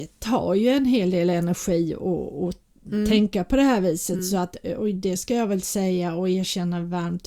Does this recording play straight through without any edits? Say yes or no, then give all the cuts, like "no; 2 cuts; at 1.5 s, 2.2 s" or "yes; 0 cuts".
yes; 0 cuts